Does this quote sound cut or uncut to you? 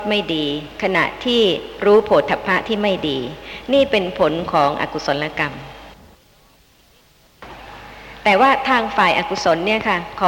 uncut